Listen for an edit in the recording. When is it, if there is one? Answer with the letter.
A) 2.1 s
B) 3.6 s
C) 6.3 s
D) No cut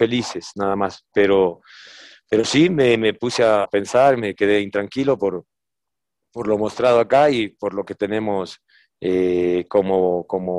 B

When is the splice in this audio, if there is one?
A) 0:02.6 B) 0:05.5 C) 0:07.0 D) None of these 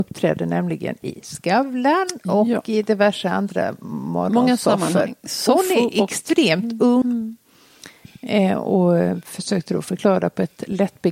C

